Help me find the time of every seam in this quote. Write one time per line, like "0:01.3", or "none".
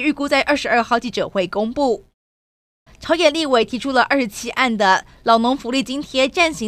0:02.9